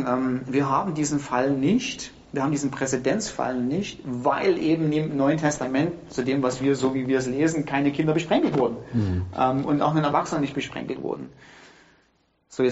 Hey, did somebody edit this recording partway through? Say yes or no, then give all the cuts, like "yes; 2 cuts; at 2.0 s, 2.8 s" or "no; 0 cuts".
no; 0 cuts